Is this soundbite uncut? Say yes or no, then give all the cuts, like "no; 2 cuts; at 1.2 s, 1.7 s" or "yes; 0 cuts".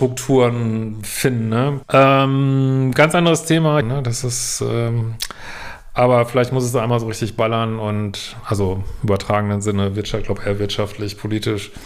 no; 2 cuts; at 1.8 s, 3.8 s